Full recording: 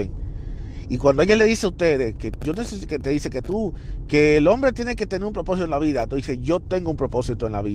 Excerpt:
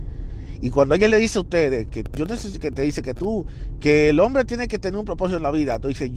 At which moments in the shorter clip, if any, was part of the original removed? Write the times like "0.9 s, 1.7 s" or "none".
none